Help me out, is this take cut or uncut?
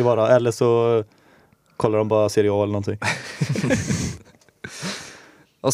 uncut